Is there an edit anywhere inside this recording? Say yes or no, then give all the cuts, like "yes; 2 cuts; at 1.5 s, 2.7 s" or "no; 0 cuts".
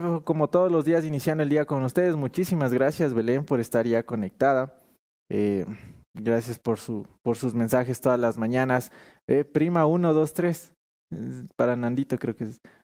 no; 0 cuts